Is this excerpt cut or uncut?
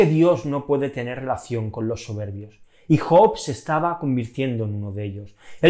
uncut